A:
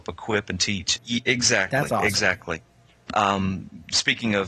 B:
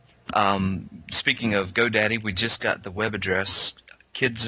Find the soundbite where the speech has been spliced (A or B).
A